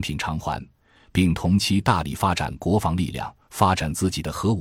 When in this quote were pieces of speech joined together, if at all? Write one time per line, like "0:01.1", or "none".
none